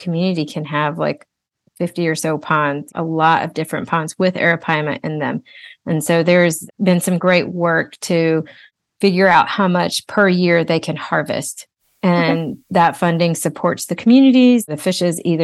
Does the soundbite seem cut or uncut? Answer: uncut